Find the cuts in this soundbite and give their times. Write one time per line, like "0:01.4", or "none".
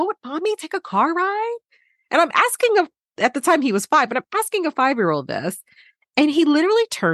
none